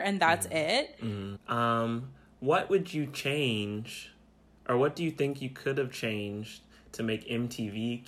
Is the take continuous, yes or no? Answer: no